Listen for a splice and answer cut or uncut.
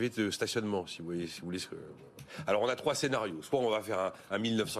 uncut